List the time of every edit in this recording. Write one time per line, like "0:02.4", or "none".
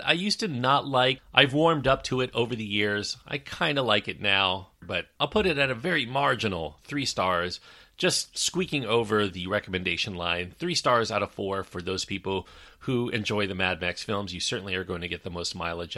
0:04.8